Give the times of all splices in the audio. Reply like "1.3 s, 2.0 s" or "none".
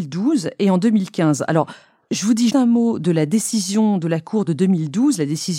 2.5 s